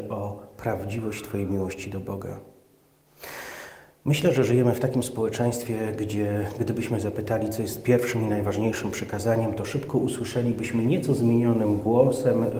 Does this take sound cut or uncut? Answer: uncut